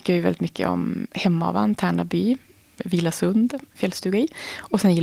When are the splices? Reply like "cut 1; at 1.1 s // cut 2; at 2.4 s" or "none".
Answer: cut 1; at 3.7 s